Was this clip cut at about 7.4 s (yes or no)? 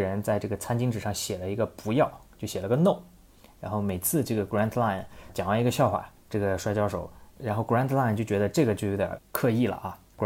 yes